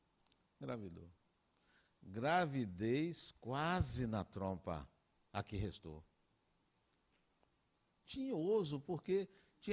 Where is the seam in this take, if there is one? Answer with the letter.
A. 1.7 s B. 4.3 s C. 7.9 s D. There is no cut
C